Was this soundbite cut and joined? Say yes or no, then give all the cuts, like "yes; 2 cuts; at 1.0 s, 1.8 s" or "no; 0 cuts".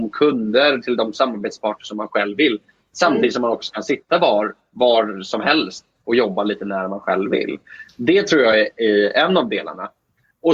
no; 0 cuts